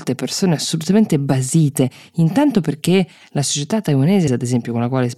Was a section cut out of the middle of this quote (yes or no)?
yes